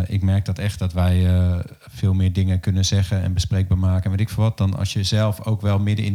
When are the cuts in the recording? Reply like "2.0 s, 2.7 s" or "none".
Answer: none

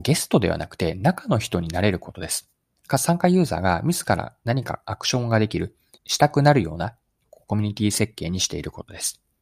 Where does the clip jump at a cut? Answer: 6.0 s

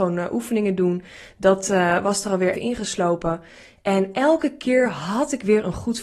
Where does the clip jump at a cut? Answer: 2.5 s

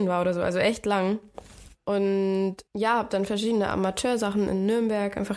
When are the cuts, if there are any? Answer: 2.7 s

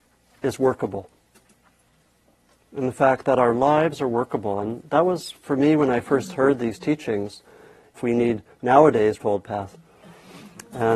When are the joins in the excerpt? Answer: 8.0 s, 9.2 s

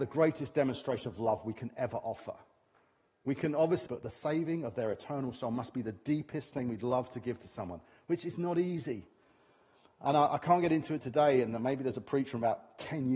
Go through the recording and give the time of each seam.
3.9 s

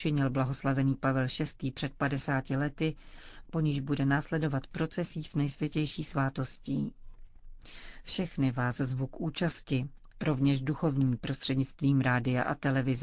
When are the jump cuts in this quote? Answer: 3.4 s

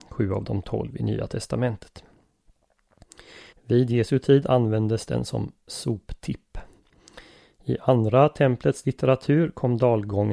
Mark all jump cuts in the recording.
3.5 s

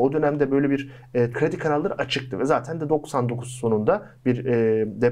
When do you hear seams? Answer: 1.3 s

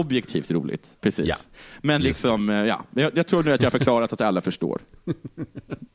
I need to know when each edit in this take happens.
1.0 s

